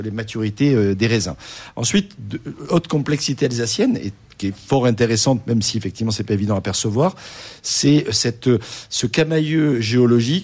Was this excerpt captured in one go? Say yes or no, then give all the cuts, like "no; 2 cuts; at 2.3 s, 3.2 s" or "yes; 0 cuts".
yes; 0 cuts